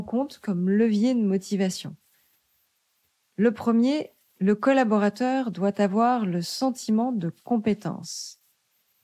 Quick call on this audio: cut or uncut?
uncut